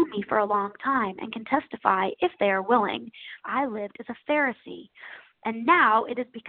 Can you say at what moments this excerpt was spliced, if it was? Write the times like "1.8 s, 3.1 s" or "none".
3.4 s